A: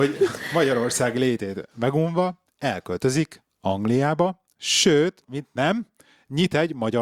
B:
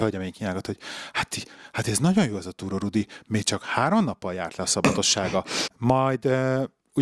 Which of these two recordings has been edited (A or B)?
B